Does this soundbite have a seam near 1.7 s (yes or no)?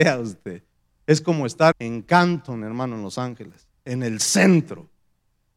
yes